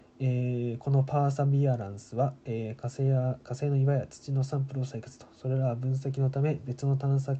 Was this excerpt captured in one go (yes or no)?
yes